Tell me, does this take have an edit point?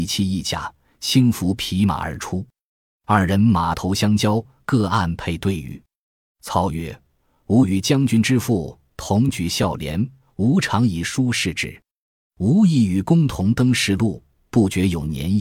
no; 0 cuts

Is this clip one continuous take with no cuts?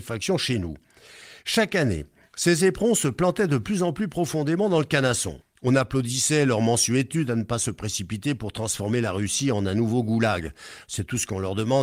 no; 2 cuts; at 5.4 s, 10.8 s

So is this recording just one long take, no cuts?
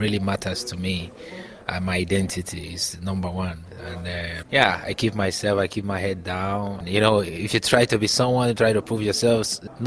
no; 2 cuts; at 4.4 s, 6.8 s

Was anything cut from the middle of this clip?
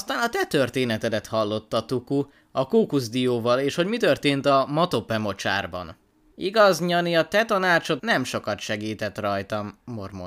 yes; 2 cuts; at 6.3 s, 8.0 s

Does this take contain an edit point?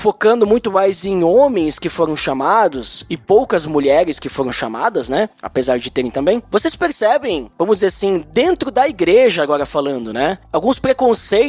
no; 0 cuts

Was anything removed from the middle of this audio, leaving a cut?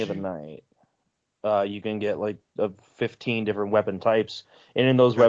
no; 0 cuts

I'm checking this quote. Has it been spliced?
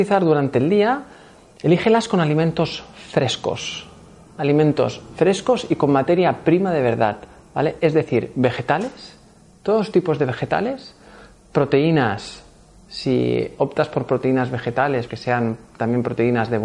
yes; 1 cut; at 15.1 s

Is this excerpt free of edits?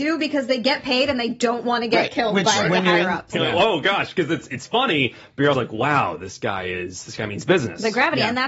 no; 2 cuts; at 3.3 s, 5.5 s

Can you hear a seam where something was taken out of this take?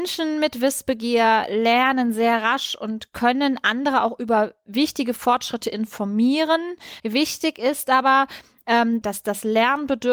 yes; 2 cuts; at 7.0 s, 9.0 s

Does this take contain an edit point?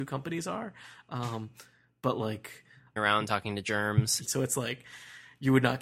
yes; 2 cuts; at 3.0 s, 4.2 s

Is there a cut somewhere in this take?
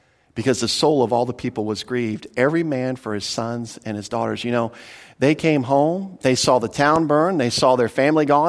no; 0 cuts

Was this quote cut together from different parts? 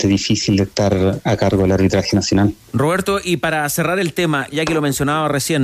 yes; 1 cut; at 4.5 s

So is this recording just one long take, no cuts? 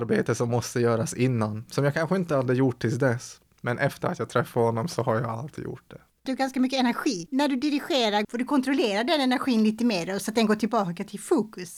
no; 1 cut; at 8.2 s

